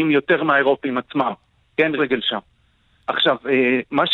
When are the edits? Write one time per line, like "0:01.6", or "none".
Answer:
0:02.0